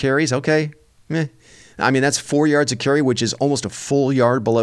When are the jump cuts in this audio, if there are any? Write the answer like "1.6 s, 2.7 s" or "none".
none